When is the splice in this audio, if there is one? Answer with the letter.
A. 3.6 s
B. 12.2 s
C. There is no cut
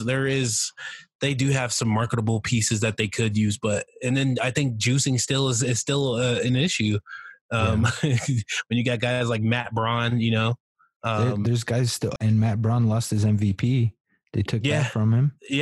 B